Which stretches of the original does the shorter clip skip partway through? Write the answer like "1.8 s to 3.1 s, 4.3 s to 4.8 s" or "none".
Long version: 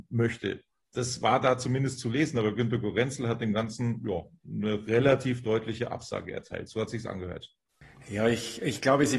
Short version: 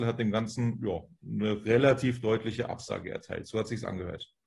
none